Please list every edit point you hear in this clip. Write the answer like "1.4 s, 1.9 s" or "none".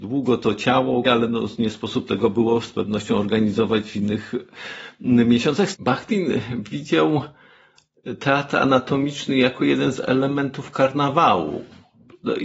1.0 s, 5.7 s